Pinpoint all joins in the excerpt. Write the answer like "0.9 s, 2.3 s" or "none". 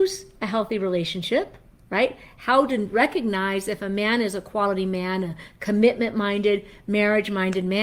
none